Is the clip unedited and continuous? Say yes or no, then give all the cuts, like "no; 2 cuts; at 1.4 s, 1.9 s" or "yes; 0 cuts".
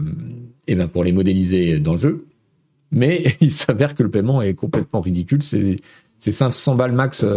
yes; 0 cuts